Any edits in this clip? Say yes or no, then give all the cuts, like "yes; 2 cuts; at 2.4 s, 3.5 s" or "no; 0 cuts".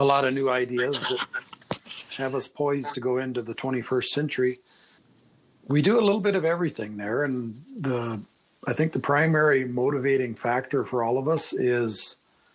no; 0 cuts